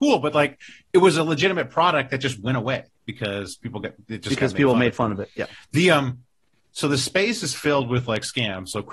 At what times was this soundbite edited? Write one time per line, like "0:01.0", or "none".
none